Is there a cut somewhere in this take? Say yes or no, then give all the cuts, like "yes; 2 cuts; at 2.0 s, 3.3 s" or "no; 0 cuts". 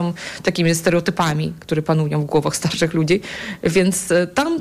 no; 0 cuts